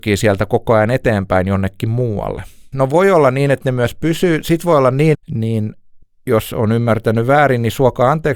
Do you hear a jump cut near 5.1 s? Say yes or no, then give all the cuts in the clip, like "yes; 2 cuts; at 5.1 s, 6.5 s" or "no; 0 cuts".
yes; 2 cuts; at 2.7 s, 5.1 s